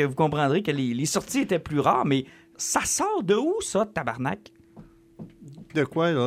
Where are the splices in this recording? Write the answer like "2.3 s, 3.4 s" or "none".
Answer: 2.6 s